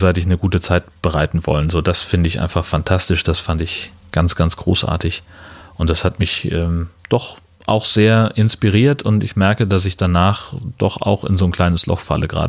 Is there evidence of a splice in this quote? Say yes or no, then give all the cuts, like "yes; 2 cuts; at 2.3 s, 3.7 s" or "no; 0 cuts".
no; 0 cuts